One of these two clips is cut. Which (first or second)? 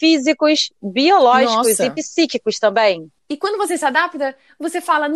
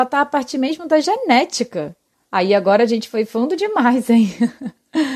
first